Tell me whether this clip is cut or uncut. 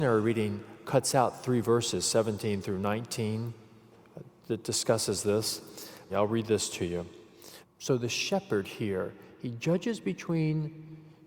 cut